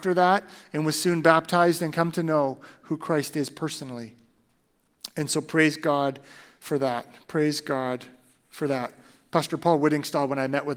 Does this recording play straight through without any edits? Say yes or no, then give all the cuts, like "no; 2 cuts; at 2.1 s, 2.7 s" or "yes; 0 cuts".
yes; 0 cuts